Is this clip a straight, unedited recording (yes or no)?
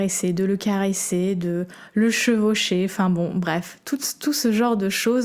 yes